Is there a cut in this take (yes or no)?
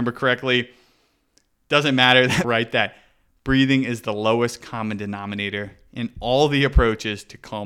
yes